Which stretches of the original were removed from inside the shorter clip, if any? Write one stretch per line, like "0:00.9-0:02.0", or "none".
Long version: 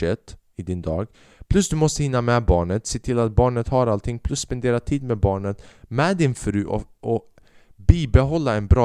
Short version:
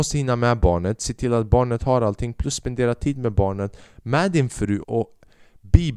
0:06.7-0:07.0